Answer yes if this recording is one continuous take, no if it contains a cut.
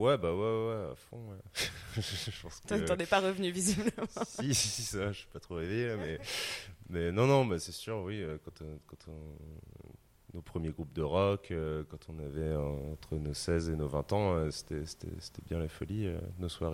yes